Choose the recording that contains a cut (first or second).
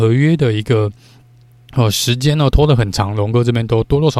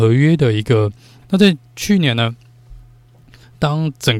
second